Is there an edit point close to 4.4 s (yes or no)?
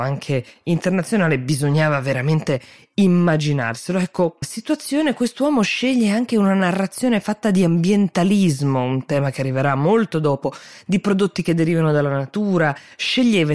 yes